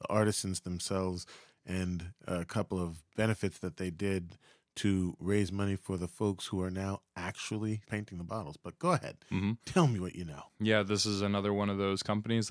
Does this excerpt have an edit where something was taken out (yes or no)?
yes